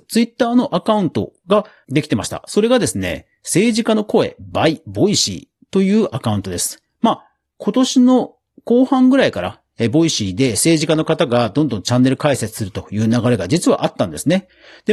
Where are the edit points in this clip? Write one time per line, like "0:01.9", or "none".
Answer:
none